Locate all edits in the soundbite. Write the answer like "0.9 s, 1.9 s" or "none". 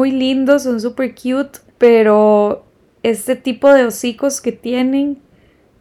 1.7 s

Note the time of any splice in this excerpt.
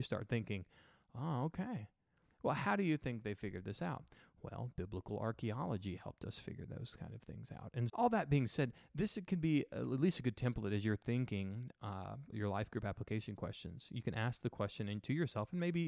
7.9 s, 12.3 s

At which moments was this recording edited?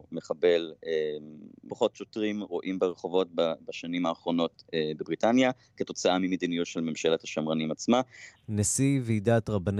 1.7 s, 8.3 s

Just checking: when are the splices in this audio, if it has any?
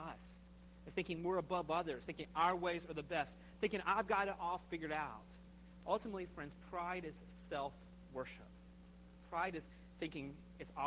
2.1 s

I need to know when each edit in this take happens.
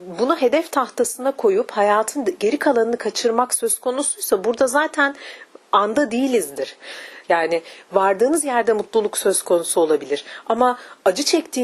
7.2 s

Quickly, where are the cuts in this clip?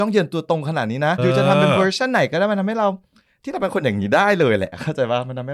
1.2 s

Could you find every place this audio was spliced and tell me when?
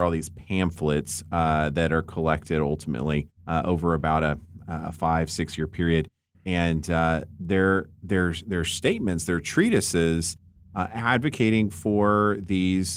3.4 s

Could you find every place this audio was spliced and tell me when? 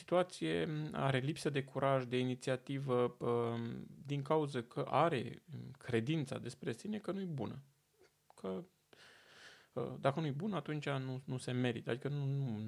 none

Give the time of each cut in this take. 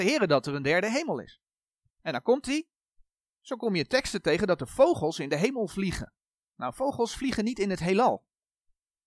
1.9 s

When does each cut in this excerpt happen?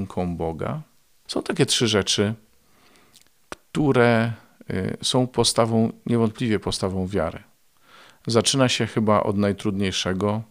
1.3 s

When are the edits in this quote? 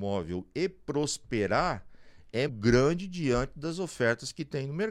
2.5 s

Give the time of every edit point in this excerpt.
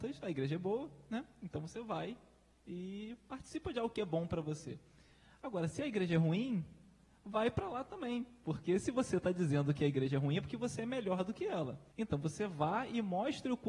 11.9 s

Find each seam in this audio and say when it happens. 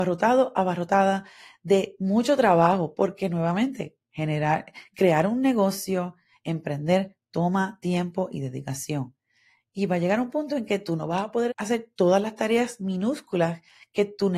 11.5 s

